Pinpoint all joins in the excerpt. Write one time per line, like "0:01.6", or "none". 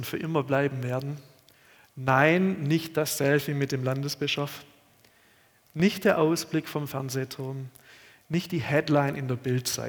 none